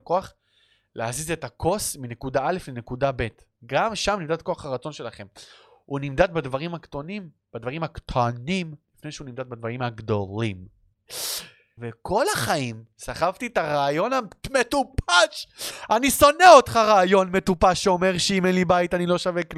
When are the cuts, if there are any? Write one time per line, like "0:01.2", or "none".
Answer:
0:11.8